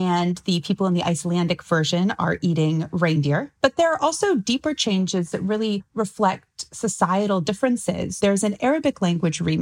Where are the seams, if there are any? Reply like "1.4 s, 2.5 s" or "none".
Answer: 8.2 s